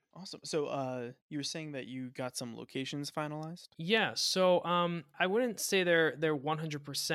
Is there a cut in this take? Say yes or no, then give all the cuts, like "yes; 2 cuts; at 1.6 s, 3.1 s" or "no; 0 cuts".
yes; 1 cut; at 5.1 s